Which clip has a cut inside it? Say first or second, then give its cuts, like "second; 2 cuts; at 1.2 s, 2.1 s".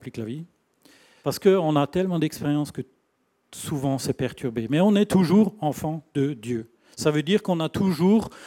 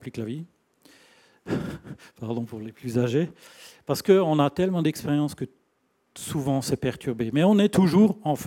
first; 1 cut; at 1.2 s